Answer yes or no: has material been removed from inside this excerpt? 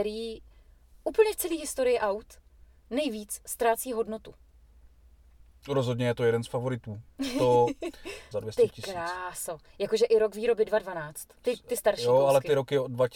yes